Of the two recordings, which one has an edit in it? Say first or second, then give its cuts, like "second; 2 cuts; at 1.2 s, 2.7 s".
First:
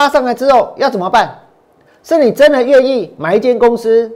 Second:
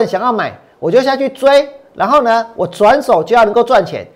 first; 1 cut; at 1.9 s